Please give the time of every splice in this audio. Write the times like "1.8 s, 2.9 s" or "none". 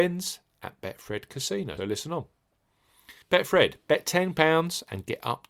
1.8 s, 3.2 s